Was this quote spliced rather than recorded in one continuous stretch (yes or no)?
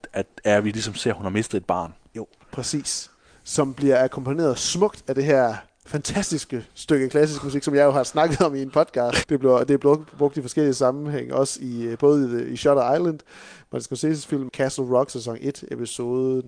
yes